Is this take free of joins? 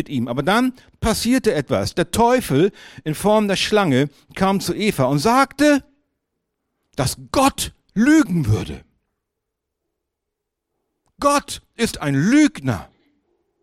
yes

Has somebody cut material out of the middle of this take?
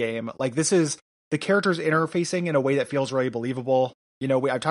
no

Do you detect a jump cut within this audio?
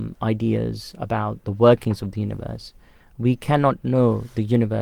no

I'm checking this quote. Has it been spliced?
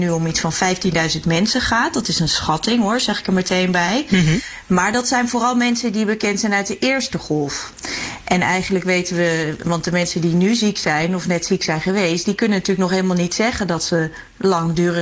no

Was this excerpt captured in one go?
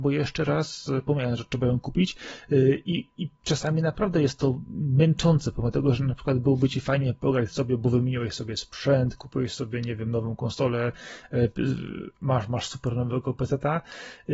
yes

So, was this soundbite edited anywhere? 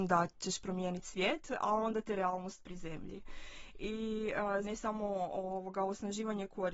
yes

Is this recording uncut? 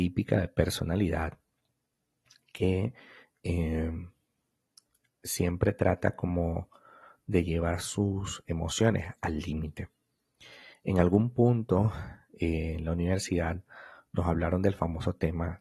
yes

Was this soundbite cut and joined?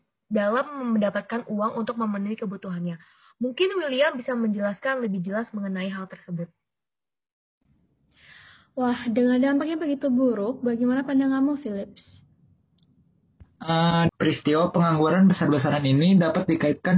yes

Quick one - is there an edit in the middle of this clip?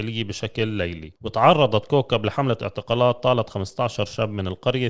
yes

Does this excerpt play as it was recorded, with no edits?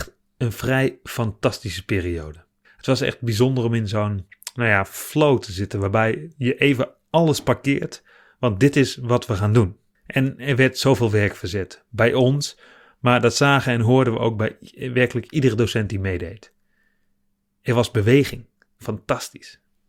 no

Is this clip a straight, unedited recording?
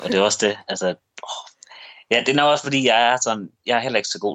yes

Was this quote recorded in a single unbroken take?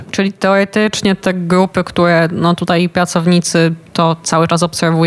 yes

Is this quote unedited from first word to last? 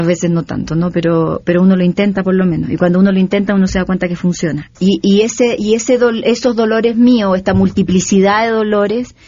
no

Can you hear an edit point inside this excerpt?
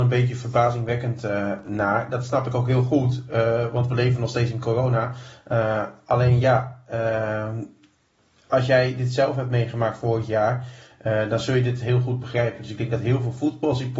no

